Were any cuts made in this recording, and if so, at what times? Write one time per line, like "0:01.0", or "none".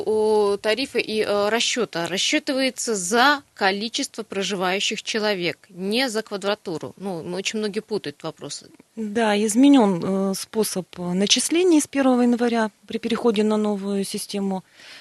none